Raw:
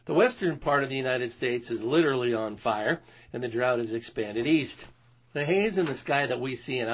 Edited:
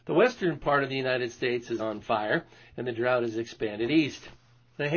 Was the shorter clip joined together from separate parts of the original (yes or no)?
yes